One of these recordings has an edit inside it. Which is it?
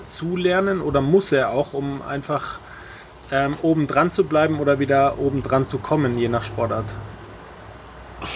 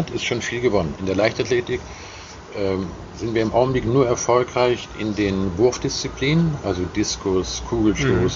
second; 1 cut; at 1.0 s

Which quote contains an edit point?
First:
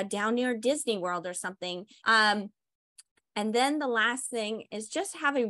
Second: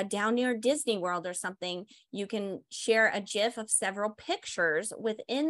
first; 1 cut; at 2.0 s

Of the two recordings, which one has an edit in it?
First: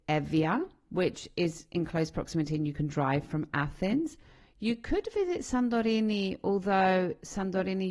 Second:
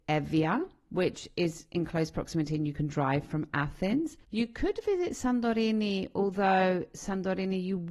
second; 1 cut; at 4.2 s

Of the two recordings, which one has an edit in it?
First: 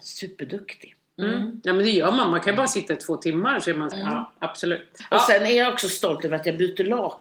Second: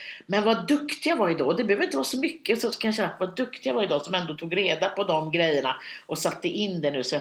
first; 1 cut; at 3.9 s

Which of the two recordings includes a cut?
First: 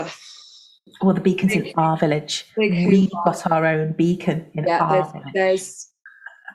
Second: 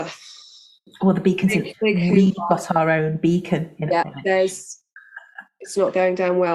second; 2 cuts; at 1.7 s, 4.0 s

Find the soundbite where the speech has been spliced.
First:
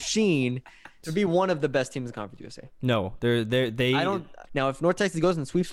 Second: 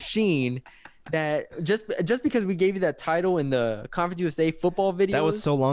first; 2 cuts; at 1.0 s, 4.5 s

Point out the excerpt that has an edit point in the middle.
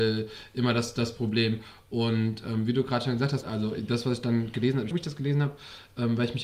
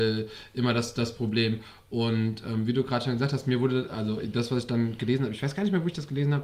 first; 2 cuts; at 3.4 s, 4.9 s

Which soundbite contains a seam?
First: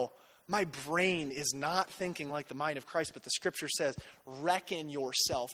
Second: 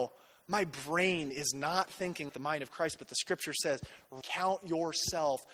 second; 2 cuts; at 2.3 s, 4.2 s

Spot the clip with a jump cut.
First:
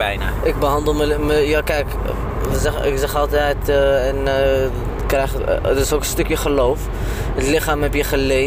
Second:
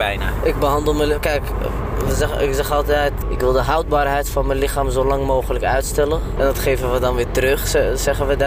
second; 3 cuts; at 1.2 s, 3.2 s, 6.4 s

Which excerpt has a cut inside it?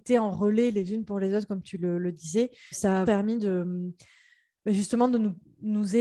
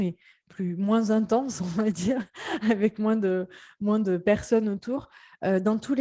first; 1 cut; at 3.1 s

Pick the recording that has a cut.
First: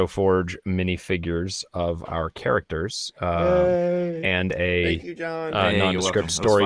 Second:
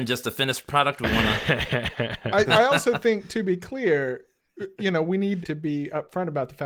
second; 2 cuts; at 2.4 s, 5.4 s

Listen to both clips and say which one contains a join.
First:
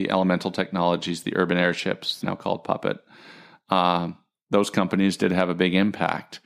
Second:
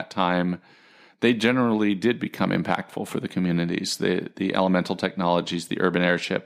first; 1 cut; at 2.2 s

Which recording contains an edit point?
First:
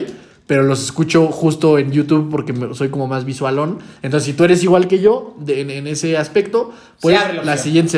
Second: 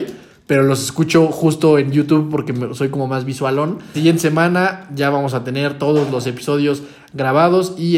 second; 1 cut; at 3.9 s

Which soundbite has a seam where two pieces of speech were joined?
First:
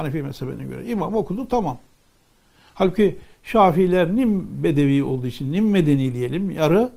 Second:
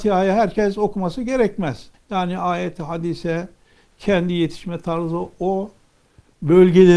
second; 1 cut; at 1.9 s

